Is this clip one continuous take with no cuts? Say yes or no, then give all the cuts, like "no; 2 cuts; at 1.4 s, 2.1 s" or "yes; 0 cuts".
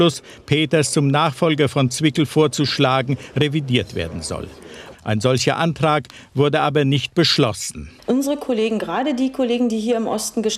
no; 2 cuts; at 4.9 s, 8.0 s